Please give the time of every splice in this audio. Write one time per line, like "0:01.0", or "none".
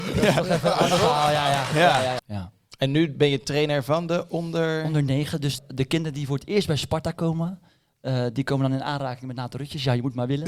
0:02.2
0:05.6